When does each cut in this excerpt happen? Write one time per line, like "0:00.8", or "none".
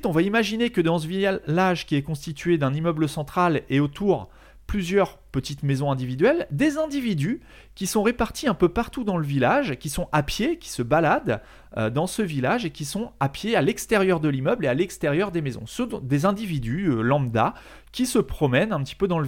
none